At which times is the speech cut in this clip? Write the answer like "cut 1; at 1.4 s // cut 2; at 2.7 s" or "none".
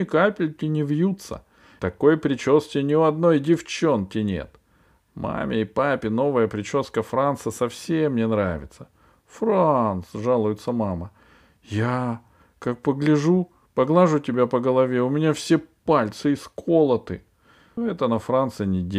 cut 1; at 1.8 s // cut 2; at 17.8 s

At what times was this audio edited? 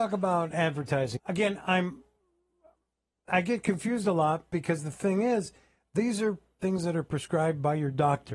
cut 1; at 1.2 s

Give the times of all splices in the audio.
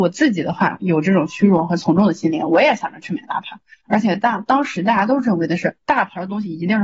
cut 1; at 5.8 s

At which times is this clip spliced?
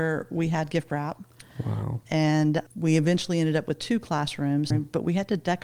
cut 1; at 2.7 s // cut 2; at 4.7 s

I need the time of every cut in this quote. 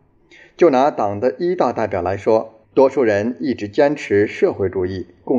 cut 1; at 2.6 s

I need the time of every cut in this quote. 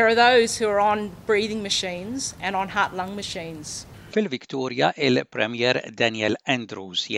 cut 1; at 4.1 s

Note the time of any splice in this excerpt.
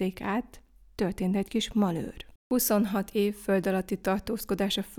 cut 1; at 2.4 s

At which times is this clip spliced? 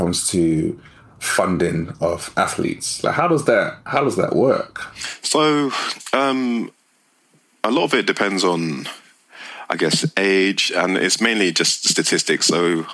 none

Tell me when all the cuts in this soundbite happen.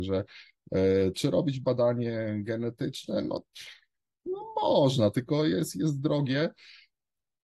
none

